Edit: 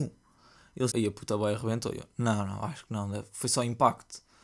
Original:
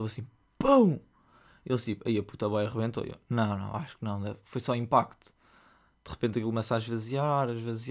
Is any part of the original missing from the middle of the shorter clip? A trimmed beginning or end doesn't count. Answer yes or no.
yes